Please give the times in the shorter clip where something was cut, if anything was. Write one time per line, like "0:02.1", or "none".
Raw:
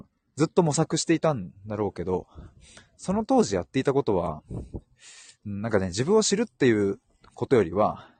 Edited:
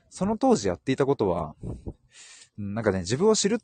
none